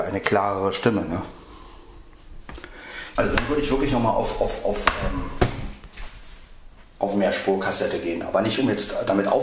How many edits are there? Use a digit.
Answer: 1